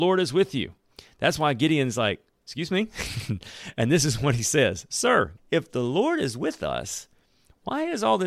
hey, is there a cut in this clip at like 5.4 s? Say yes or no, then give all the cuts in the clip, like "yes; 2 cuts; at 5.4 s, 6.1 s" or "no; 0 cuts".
yes; 1 cut; at 5.4 s